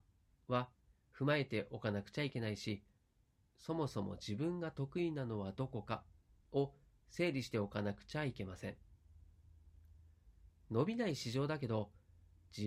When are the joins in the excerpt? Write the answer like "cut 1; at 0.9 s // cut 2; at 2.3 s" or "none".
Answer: cut 1; at 3.5 s